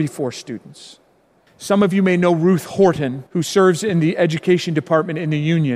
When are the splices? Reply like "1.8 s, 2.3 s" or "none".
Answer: 1.5 s, 3.3 s

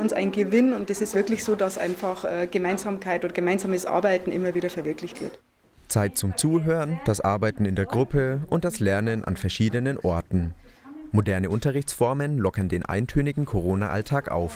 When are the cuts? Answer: none

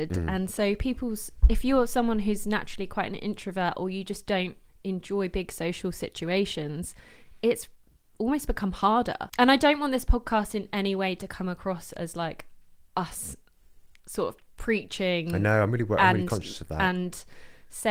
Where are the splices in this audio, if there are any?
9.3 s

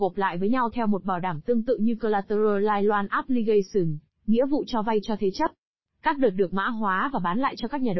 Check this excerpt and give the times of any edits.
5.9 s

